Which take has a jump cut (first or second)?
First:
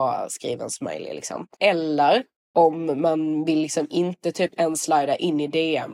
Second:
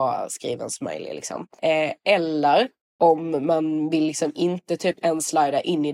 first